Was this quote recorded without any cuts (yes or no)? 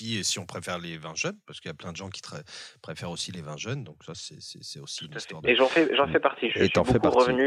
yes